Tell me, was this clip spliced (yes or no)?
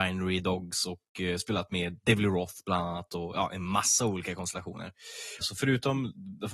yes